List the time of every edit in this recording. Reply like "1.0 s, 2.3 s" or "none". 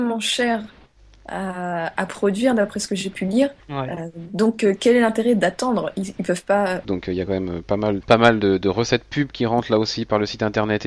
3.6 s, 6.8 s, 8.0 s